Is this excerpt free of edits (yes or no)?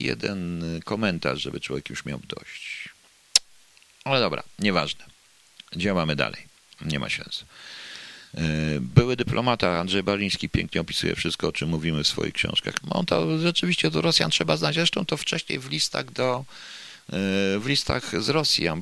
no